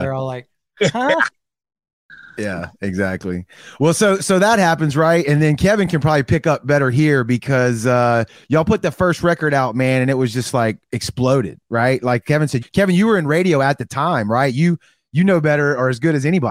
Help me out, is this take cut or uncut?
cut